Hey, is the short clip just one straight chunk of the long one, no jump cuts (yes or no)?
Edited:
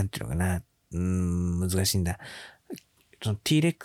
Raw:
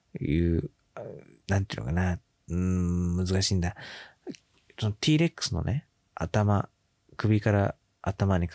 yes